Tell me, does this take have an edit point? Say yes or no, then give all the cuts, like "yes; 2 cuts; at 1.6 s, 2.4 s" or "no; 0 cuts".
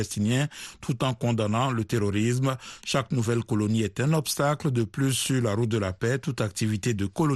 no; 0 cuts